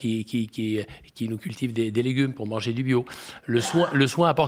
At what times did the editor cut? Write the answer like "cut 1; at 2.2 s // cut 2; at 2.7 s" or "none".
none